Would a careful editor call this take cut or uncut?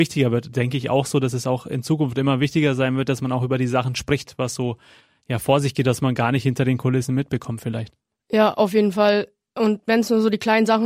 uncut